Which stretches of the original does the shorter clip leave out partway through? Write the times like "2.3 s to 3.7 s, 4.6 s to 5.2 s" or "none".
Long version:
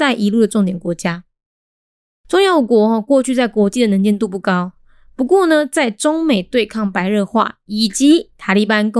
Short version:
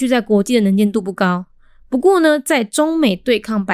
none